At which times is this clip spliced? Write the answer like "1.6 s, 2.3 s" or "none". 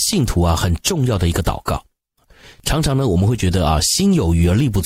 none